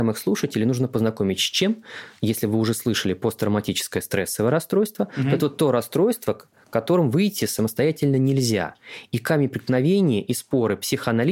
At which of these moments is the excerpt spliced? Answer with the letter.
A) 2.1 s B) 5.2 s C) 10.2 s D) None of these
D